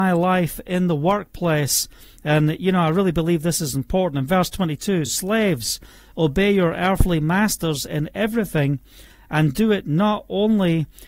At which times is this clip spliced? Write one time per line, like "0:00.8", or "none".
none